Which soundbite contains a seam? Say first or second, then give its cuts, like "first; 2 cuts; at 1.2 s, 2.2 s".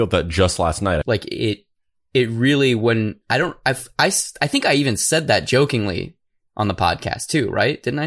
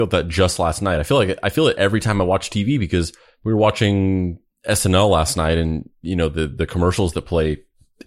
first; 1 cut; at 1.0 s